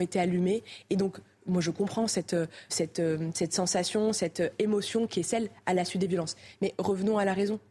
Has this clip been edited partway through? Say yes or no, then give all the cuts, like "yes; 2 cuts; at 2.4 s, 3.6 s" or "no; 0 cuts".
yes; 1 cut; at 2.7 s